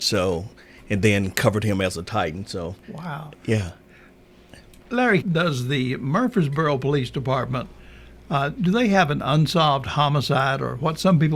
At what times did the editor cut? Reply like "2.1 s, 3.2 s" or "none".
2.8 s, 5.2 s